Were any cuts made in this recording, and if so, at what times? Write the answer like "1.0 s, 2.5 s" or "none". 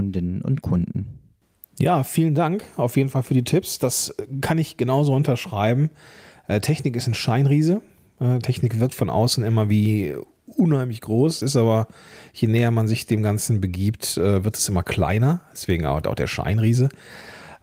none